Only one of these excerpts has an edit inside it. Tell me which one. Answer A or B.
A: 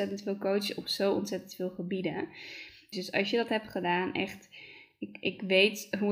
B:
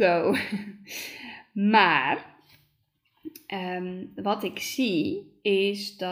A